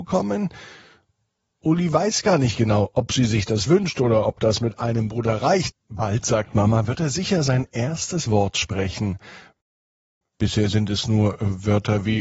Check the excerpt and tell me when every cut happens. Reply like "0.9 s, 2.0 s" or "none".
5.7 s

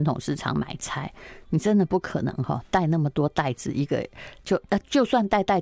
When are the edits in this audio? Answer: none

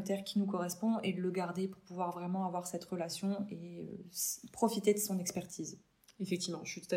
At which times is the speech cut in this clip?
none

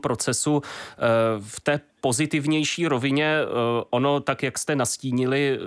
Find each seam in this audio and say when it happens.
none

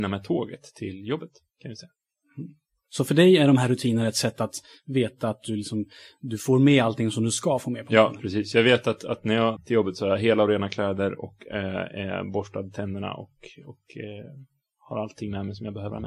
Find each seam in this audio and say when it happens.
9.6 s

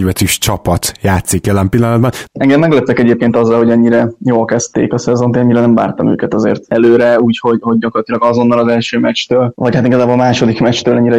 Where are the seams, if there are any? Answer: 2.3 s

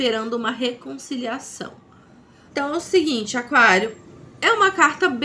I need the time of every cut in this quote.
2.5 s

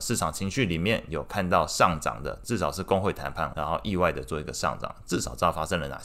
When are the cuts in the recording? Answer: 2.4 s, 3.5 s

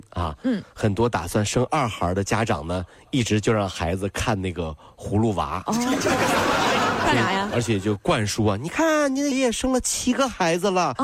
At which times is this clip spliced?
9.3 s

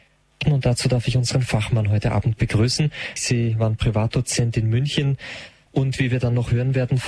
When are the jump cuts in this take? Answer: 3.2 s, 5.7 s

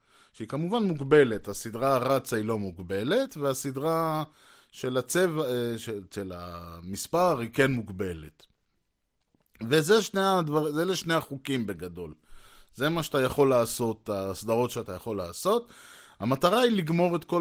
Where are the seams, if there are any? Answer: none

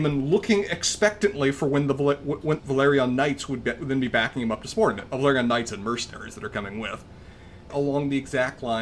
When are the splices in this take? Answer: 2.6 s, 7.7 s

